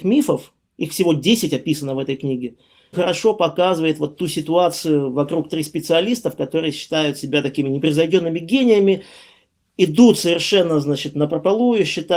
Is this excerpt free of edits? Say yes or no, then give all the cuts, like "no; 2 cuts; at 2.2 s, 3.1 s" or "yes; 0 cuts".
no; 1 cut; at 2.9 s